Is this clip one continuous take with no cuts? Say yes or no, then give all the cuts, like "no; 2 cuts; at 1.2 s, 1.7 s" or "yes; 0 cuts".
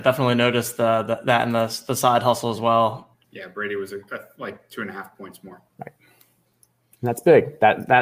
no; 2 cuts; at 3.2 s, 5.7 s